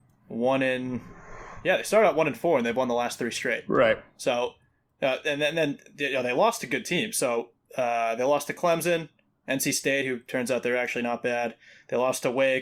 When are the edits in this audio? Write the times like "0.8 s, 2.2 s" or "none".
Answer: none